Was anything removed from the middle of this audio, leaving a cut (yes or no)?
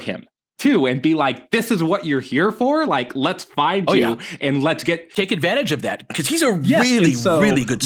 no